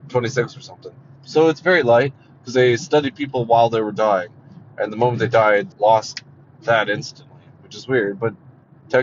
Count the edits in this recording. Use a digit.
2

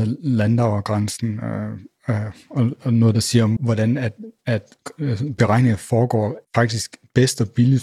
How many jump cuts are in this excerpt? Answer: 2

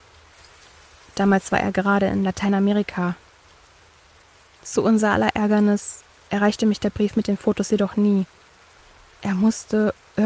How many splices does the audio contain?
0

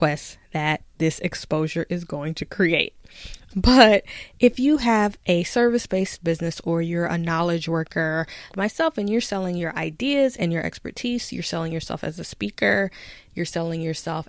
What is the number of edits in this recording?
2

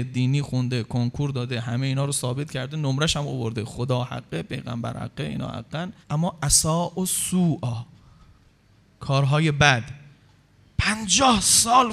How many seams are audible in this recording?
1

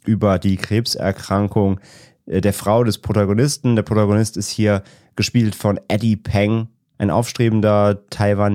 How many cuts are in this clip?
0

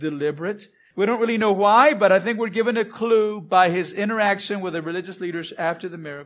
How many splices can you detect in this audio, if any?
1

